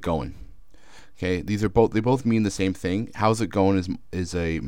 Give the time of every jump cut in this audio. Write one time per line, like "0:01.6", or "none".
none

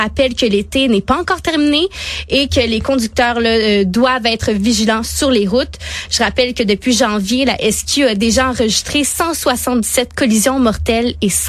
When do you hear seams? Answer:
none

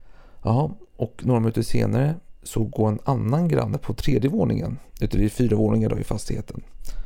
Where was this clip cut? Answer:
none

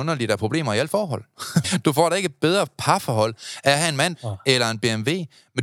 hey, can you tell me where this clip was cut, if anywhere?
0:01.6
0:04.1

